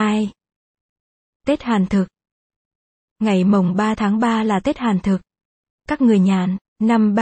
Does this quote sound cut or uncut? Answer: cut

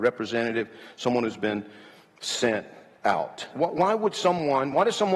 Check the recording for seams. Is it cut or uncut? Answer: cut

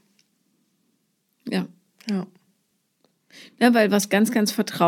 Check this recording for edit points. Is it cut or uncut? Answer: uncut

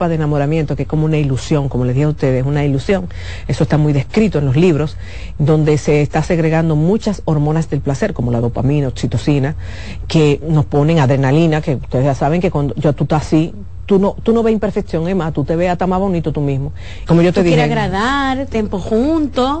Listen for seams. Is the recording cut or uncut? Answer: cut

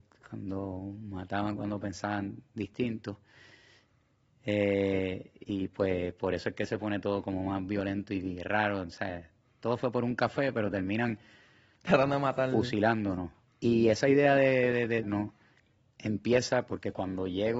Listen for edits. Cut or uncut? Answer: cut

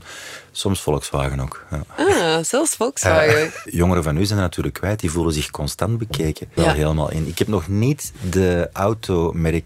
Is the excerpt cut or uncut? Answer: cut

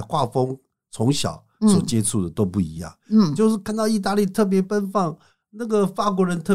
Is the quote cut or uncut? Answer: uncut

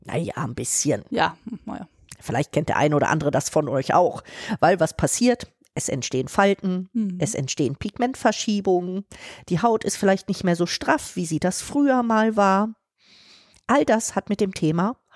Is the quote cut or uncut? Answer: uncut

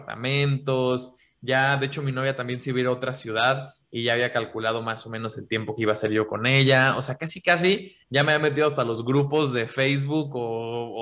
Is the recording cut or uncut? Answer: uncut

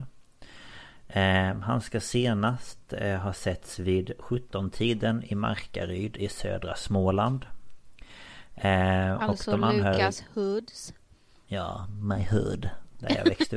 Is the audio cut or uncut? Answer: uncut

